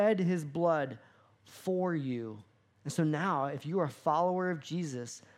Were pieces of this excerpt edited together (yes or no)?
no